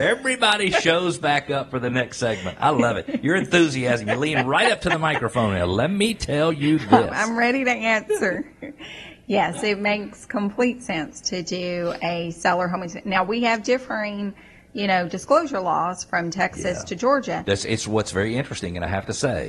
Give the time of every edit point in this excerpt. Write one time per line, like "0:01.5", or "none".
none